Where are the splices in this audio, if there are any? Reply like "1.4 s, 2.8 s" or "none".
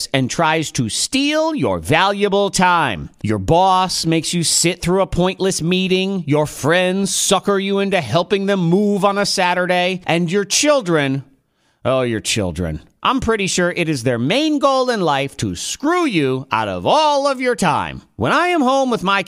none